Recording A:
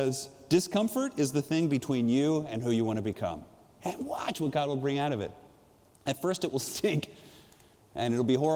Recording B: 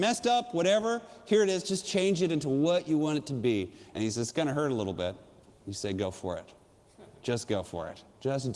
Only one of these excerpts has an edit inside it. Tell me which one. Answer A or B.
A